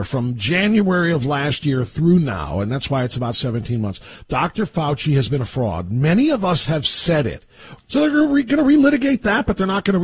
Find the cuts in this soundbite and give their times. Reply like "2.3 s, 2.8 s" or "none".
7.8 s